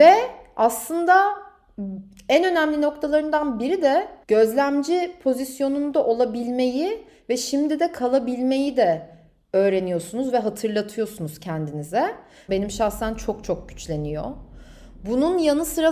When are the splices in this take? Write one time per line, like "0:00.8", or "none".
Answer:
0:04.2
0:12.5